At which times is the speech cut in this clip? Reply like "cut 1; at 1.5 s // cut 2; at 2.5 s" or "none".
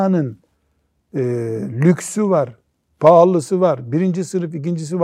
none